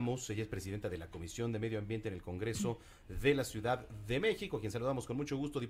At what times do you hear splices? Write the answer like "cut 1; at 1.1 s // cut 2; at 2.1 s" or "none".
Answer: none